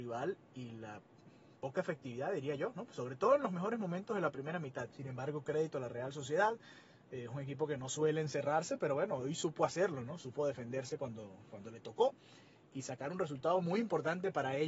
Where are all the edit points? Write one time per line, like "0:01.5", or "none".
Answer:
0:04.9

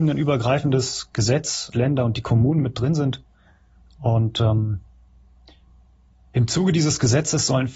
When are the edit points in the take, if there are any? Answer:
0:01.7

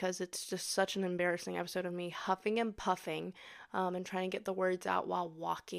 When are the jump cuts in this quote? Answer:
none

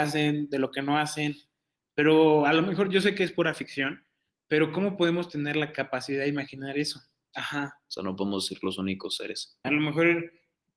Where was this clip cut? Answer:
0:07.3
0:09.6

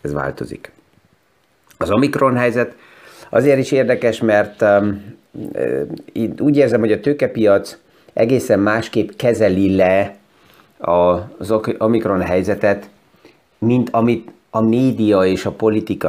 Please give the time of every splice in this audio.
none

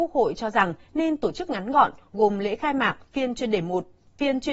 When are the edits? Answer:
none

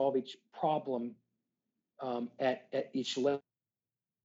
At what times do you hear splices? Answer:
none

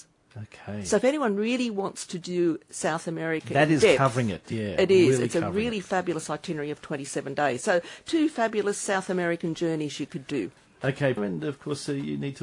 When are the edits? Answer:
0:11.2

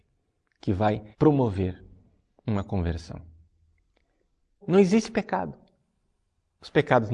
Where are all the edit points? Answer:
0:01.1
0:04.6

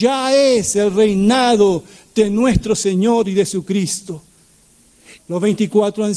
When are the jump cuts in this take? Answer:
0:05.2

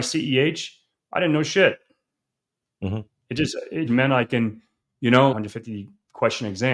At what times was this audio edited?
0:03.9
0:05.3

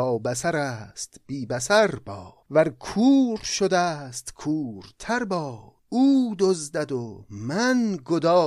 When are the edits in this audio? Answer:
0:02.4
0:05.8

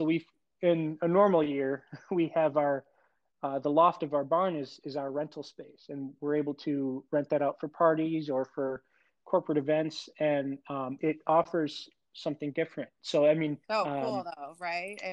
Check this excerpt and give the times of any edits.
0:11.0
0:13.6

